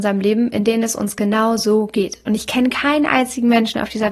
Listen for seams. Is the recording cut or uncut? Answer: uncut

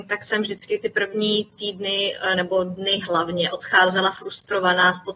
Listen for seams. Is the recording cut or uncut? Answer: uncut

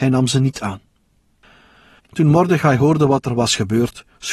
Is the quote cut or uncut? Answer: cut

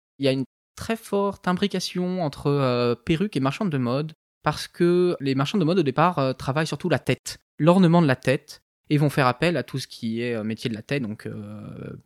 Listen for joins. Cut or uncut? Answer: uncut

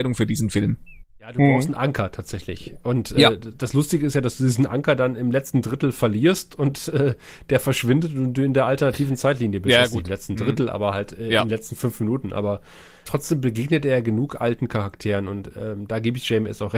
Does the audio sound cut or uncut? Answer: uncut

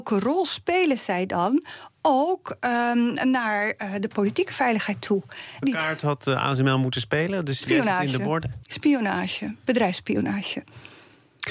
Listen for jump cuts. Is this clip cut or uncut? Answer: cut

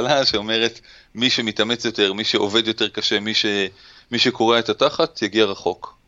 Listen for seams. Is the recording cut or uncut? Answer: uncut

